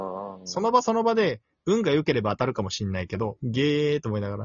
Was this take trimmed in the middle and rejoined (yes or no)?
yes